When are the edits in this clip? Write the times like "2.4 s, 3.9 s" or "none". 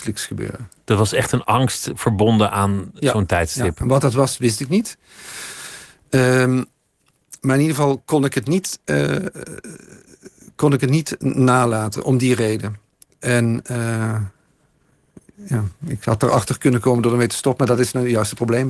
none